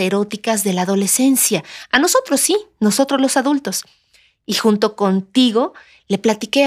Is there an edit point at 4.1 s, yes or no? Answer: no